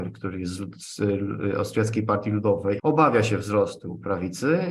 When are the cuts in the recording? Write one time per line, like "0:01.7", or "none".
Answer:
0:02.8